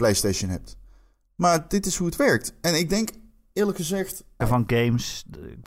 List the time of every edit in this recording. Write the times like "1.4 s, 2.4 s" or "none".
4.4 s